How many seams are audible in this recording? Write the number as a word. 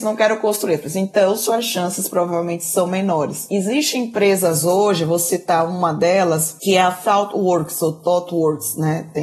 zero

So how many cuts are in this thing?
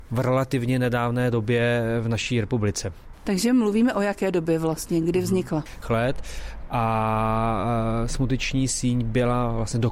one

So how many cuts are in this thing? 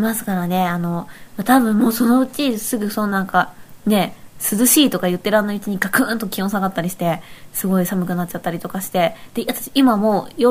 one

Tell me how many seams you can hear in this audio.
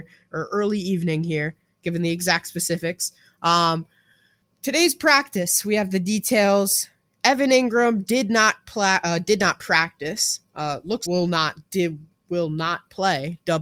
one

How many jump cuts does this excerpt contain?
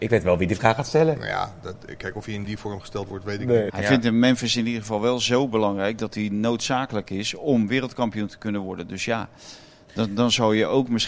one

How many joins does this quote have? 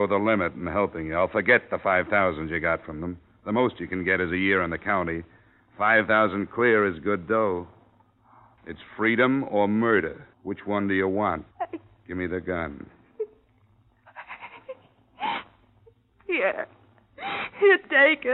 three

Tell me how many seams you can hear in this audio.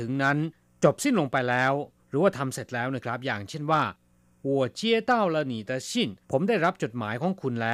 one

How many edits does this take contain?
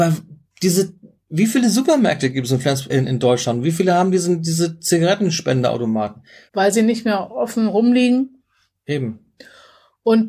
two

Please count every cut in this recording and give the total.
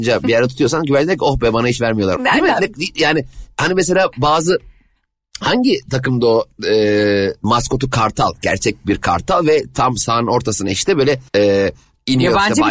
three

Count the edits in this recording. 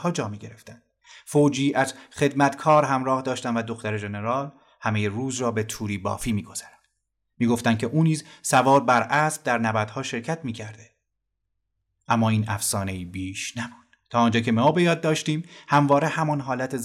zero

